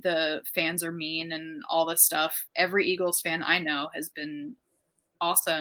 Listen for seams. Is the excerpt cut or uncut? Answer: cut